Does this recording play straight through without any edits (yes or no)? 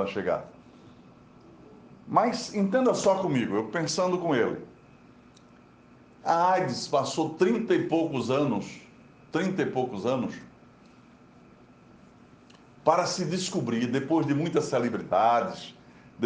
yes